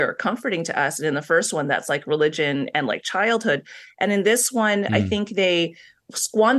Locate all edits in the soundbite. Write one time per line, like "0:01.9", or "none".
none